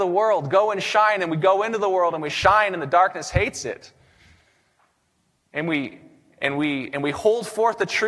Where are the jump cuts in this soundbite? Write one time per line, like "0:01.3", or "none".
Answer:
none